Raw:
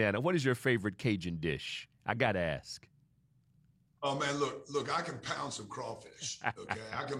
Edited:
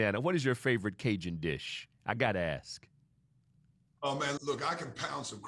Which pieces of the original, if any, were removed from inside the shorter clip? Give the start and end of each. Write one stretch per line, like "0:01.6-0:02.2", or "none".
0:04.4-0:04.6